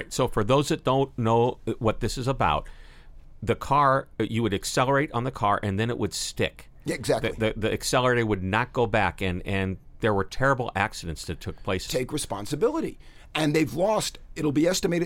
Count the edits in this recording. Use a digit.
1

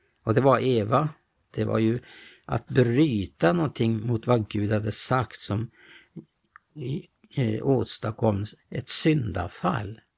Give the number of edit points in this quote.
2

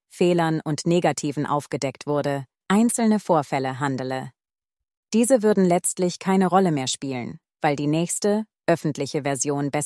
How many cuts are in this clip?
1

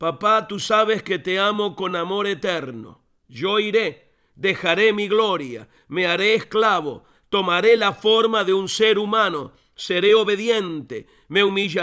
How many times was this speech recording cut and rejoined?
0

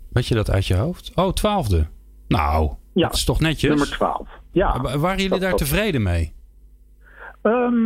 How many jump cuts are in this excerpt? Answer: 1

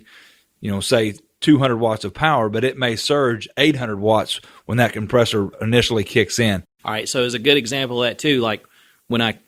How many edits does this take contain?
0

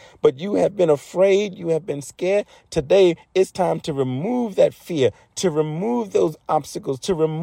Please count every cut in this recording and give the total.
1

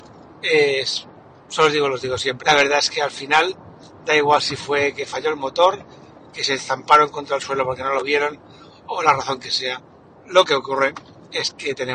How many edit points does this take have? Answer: 1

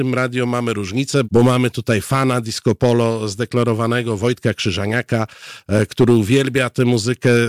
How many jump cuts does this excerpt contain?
1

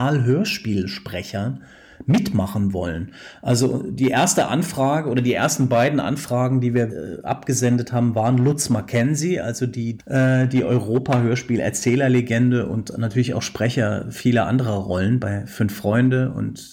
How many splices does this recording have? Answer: 2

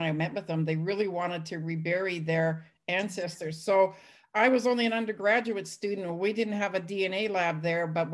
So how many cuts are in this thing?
0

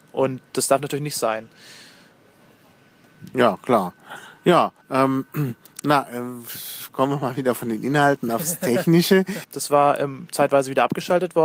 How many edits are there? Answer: 2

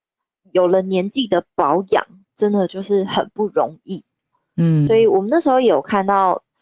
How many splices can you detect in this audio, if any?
1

